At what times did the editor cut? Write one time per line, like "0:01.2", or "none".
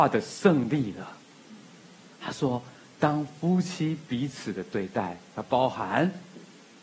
0:02.1
0:05.3